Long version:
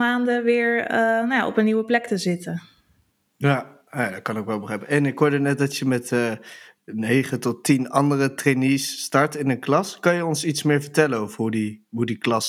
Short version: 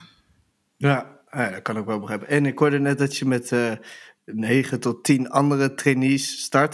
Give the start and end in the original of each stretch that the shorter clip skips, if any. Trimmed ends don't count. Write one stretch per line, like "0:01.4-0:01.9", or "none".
none